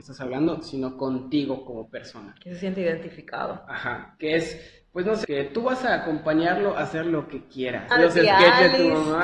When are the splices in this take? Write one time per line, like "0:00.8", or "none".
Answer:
0:05.2
0:07.9